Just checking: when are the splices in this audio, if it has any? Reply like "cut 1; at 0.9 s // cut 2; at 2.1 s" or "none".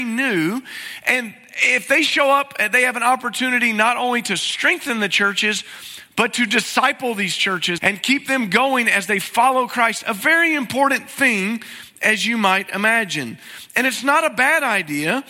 cut 1; at 7.8 s